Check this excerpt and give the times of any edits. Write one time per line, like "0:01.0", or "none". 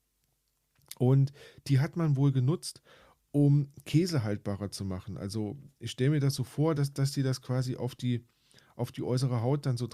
none